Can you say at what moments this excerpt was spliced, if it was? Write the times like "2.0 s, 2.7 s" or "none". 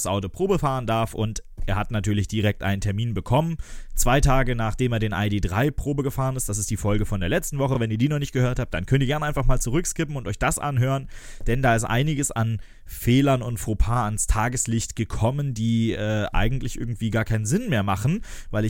none

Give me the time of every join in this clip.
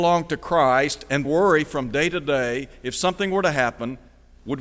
1.2 s

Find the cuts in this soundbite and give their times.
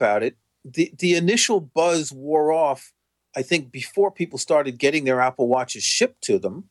none

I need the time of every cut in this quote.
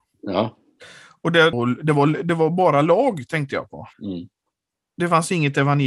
1.5 s, 3.9 s

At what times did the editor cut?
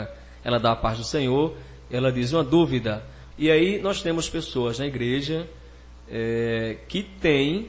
3.3 s

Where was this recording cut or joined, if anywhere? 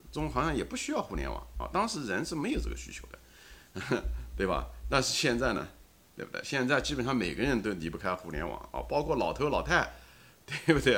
none

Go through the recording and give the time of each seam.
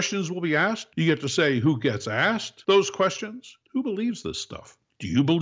3.6 s

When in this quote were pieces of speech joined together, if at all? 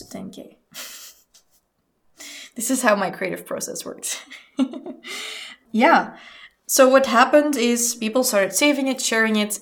5.7 s

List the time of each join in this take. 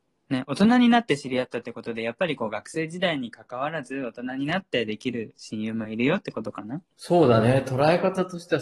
6.9 s

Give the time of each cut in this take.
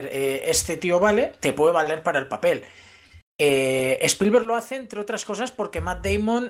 1.4 s

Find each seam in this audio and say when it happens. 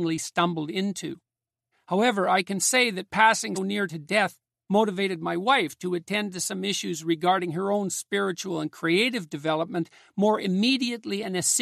1.7 s, 3.5 s

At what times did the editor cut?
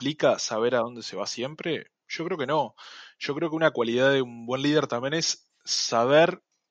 none

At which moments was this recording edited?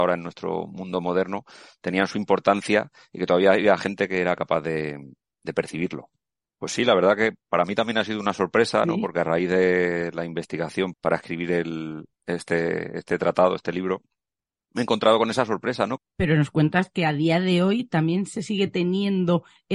6.5 s, 10.9 s, 16.0 s

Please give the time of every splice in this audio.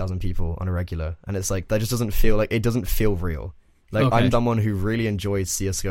4.3 s

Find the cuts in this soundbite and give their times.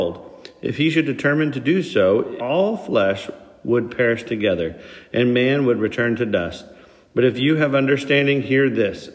2.4 s

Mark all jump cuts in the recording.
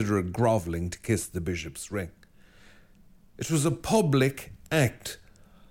none

